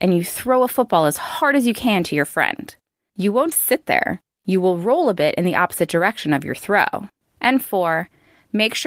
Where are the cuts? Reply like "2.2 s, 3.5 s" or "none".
3.5 s, 7.2 s